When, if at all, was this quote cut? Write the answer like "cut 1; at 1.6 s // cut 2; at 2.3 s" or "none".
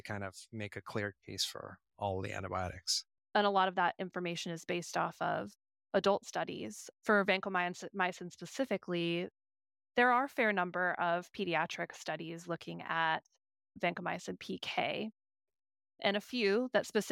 cut 1; at 3.2 s